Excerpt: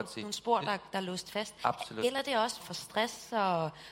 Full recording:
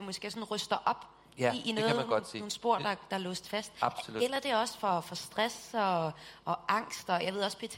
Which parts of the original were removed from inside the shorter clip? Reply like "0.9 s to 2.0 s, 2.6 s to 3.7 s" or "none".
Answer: 4.8 s to 5.0 s